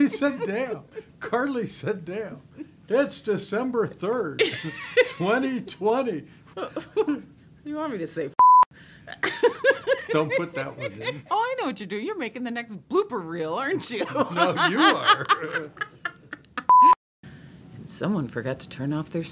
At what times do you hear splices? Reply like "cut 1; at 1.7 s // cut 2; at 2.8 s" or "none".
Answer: cut 1; at 6.5 s